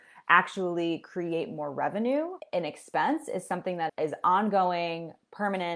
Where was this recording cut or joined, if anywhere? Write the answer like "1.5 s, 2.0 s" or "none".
3.9 s

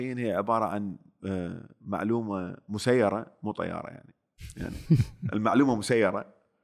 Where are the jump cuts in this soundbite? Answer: none

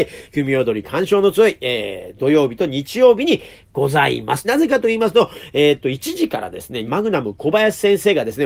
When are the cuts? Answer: 4.4 s, 6.9 s

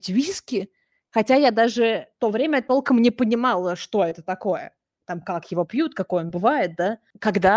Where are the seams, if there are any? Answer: none

